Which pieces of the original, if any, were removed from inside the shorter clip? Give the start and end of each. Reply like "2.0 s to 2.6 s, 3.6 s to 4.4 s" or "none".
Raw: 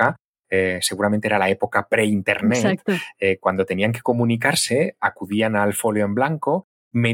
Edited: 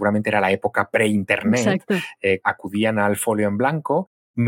3.4 s to 5.0 s

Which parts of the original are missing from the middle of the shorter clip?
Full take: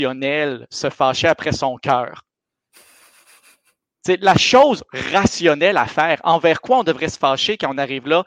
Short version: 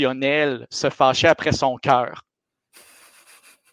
none

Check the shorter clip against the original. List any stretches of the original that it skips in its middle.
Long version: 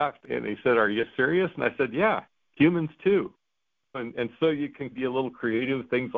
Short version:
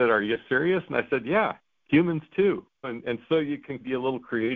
3.4 s to 3.9 s

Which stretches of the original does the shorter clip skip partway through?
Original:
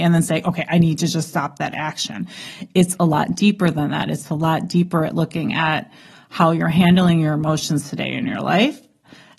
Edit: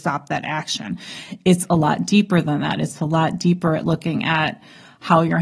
none

